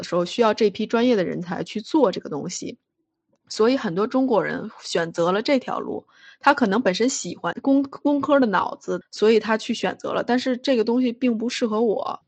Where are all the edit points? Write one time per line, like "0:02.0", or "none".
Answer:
0:07.5
0:09.0